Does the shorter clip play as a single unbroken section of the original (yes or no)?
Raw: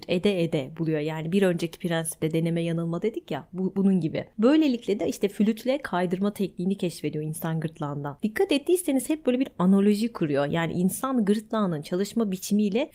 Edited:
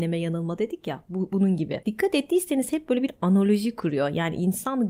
no